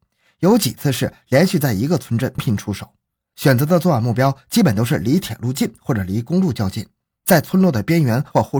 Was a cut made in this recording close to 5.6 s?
no; 1 cut; at 2.4 s

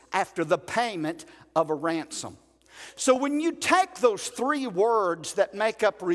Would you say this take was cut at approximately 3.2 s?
no; 0 cuts

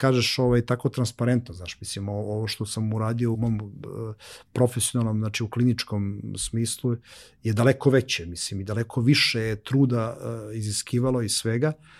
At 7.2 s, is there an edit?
no; 1 cut; at 3.3 s

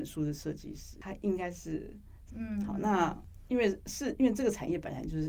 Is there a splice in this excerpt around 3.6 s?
no; 1 cut; at 2.3 s

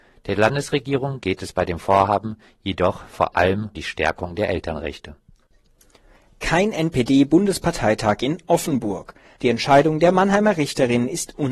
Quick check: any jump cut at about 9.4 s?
yes; 2 cuts; at 3.7 s, 9.4 s

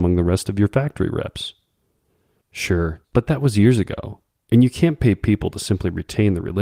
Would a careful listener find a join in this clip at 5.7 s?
no; 1 cut; at 3.0 s

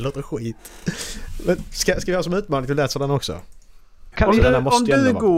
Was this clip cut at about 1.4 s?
no; 1 cut; at 4.1 s

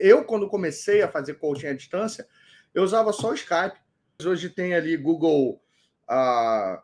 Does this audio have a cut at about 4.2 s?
yes; 1 cut; at 4.2 s

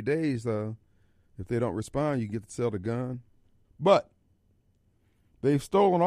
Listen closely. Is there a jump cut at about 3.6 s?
yes; 1 cut; at 3.6 s

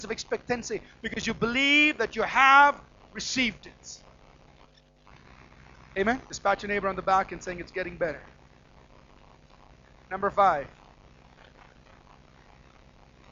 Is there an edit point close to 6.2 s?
yes; 1 cut; at 6.2 s

